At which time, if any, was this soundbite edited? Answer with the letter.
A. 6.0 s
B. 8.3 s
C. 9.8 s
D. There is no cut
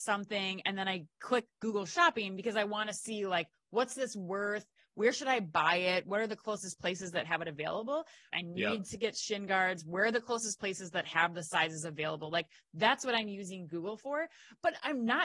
B